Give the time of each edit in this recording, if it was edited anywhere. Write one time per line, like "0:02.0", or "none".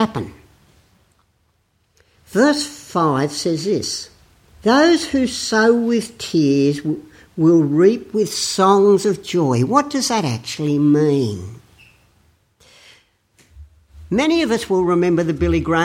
none